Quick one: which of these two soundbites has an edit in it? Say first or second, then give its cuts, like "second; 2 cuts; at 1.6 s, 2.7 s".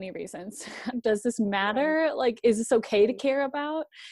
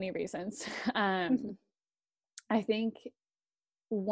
first; 1 cut; at 0.9 s